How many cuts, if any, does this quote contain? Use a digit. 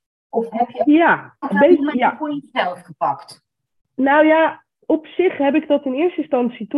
1